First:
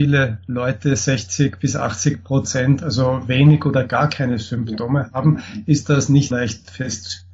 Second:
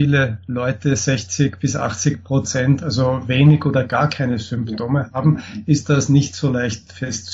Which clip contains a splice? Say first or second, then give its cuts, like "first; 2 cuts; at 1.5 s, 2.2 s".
first; 1 cut; at 6.3 s